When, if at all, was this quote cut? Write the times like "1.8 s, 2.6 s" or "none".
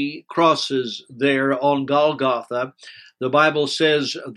none